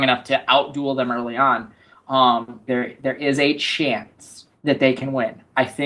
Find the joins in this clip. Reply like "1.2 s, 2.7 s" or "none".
2.7 s